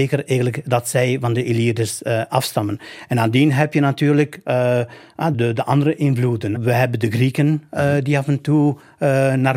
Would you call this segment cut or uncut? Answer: cut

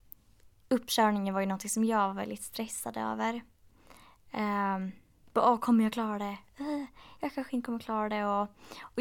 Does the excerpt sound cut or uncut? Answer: uncut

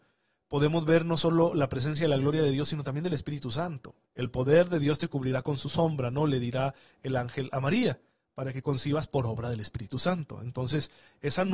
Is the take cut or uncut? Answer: cut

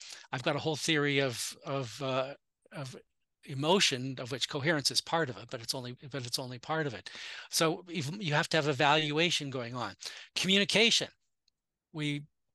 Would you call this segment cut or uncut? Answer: uncut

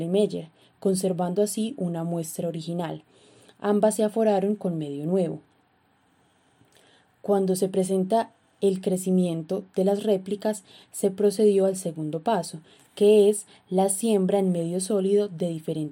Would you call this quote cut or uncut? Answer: uncut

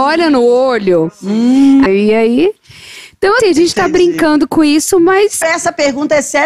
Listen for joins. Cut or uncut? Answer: cut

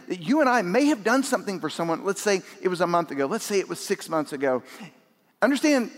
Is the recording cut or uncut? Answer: uncut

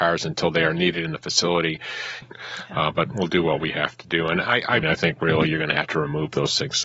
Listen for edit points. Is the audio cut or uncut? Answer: cut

